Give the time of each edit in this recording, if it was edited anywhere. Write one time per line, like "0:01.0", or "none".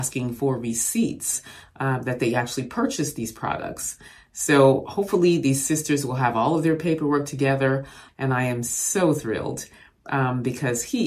0:08.1